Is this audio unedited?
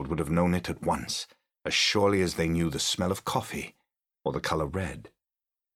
yes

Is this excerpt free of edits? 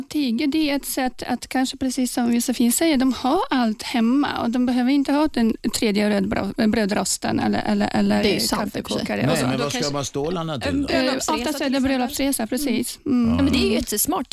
yes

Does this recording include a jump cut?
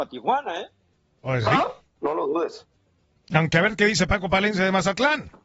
no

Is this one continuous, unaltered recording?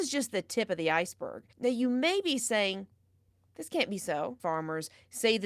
no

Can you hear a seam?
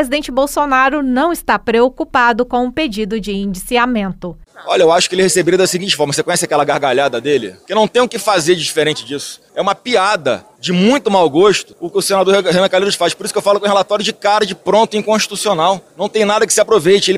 no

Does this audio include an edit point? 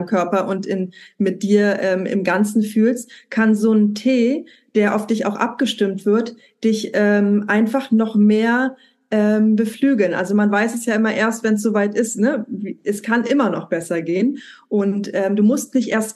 no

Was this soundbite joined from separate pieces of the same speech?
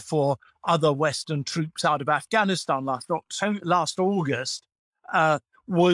no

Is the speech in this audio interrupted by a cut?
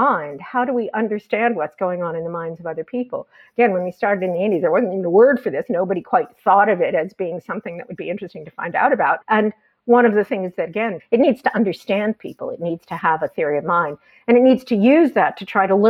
yes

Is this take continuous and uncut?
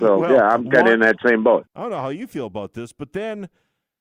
no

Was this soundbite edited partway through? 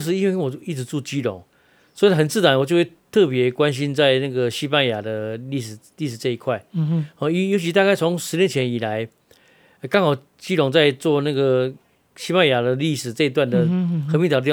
no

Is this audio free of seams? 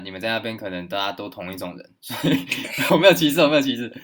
no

